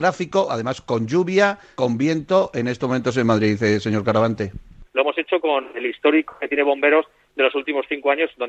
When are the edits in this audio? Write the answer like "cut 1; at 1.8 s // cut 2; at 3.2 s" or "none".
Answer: cut 1; at 1.7 s // cut 2; at 4.8 s